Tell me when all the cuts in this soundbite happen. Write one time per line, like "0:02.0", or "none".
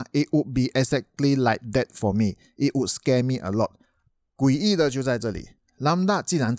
none